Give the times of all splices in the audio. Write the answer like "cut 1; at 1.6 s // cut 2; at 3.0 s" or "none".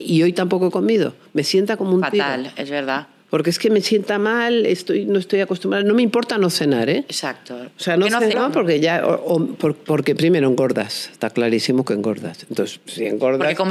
cut 1; at 8.3 s